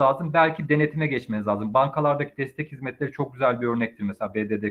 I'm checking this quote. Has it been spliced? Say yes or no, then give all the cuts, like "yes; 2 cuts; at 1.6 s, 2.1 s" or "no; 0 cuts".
no; 0 cuts